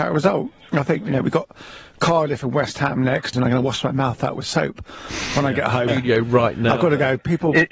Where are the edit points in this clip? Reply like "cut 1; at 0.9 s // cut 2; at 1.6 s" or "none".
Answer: cut 1; at 3.3 s // cut 2; at 5.9 s